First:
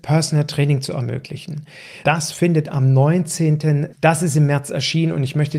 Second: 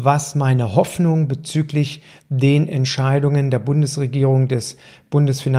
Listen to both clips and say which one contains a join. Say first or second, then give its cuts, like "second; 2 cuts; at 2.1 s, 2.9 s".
first; 2 cuts; at 2.0 s, 3.9 s